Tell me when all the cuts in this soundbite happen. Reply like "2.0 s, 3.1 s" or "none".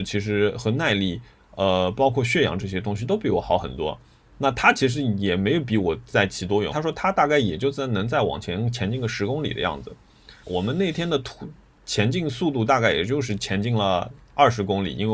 6.7 s, 10.4 s